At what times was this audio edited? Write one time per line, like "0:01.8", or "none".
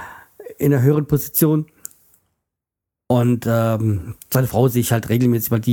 none